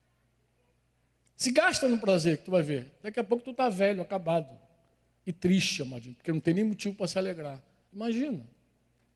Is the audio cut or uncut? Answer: cut